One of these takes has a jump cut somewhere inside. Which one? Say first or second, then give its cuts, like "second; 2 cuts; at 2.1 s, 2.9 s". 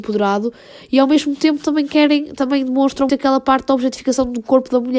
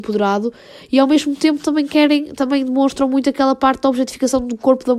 first; 1 cut; at 3.1 s